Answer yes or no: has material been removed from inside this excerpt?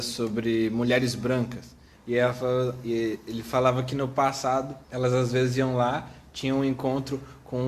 yes